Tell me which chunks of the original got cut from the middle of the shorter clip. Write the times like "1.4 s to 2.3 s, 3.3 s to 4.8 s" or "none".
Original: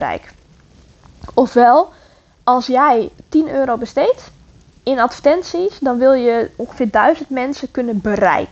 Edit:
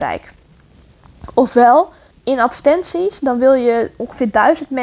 2.1 s to 4.7 s